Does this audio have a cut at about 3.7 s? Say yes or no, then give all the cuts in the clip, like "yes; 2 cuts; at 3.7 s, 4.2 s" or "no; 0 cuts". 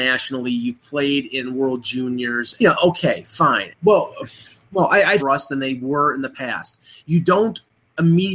yes; 3 cuts; at 2.6 s, 3.7 s, 5.2 s